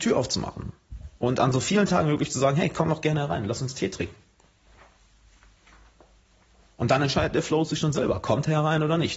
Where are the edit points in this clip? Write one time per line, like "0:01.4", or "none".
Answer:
none